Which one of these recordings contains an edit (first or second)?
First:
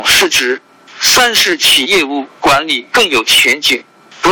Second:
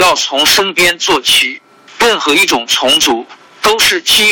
first